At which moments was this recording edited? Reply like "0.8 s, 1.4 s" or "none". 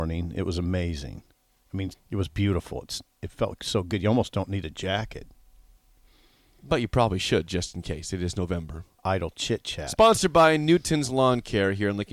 1.9 s, 8.9 s